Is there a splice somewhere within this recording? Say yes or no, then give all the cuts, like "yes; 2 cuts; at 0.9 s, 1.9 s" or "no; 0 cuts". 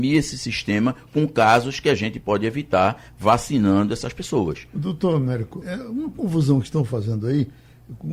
yes; 1 cut; at 5.6 s